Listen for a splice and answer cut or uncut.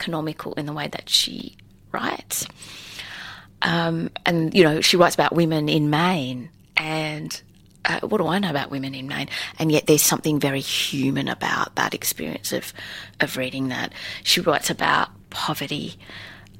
uncut